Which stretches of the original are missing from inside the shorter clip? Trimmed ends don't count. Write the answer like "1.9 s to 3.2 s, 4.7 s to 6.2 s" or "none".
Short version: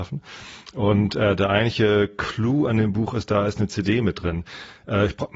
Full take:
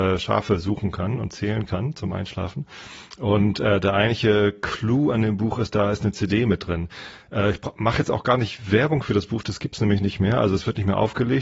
none